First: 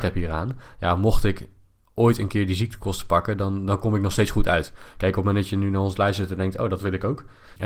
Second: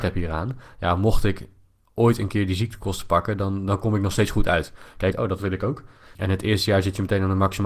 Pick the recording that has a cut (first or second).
second